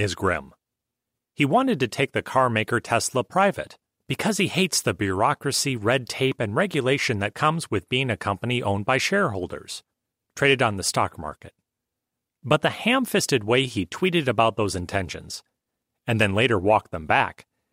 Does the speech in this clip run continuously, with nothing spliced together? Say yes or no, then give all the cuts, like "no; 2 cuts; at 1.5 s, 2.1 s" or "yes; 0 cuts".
yes; 0 cuts